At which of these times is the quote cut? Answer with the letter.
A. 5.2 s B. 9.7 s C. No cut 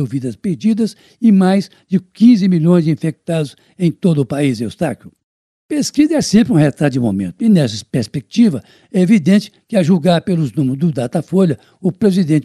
C